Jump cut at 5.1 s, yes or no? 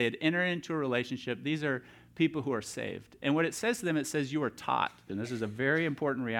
yes